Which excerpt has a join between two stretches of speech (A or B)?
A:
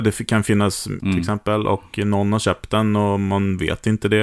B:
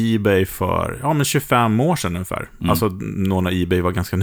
A